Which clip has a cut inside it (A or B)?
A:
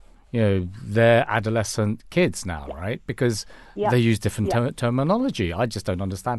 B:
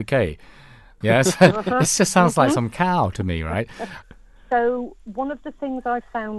B